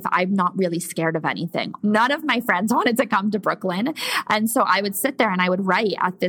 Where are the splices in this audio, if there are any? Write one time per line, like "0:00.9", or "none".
0:01.8